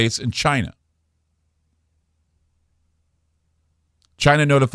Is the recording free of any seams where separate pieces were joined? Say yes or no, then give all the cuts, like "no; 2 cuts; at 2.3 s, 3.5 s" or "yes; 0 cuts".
yes; 0 cuts